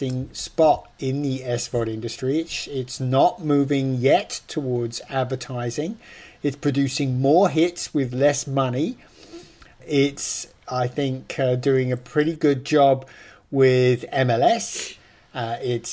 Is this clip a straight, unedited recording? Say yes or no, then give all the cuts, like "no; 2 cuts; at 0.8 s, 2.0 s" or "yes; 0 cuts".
yes; 0 cuts